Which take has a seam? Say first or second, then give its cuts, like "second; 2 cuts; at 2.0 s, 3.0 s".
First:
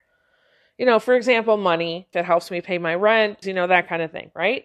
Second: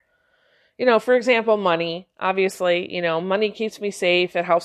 first; 2 cuts; at 2.1 s, 3.4 s